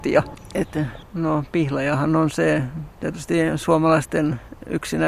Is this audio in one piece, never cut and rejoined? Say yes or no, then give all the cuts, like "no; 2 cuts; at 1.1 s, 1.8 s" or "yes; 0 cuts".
no; 1 cut; at 1.0 s